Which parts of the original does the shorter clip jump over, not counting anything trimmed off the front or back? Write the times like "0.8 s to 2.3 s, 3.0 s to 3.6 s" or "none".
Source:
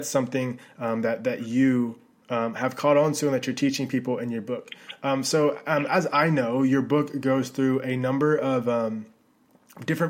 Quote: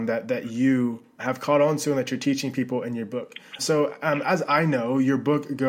2.1 s to 2.5 s, 4.9 s to 5.2 s